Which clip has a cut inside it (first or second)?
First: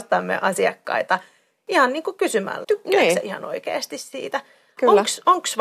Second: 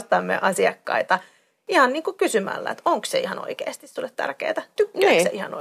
first